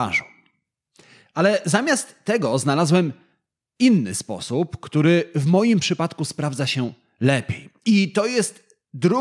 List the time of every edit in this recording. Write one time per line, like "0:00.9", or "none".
none